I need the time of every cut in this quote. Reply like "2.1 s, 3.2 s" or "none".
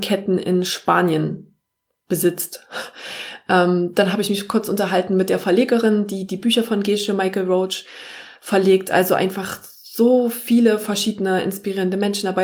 none